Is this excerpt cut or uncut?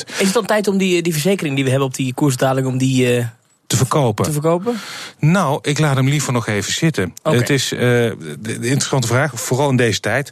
uncut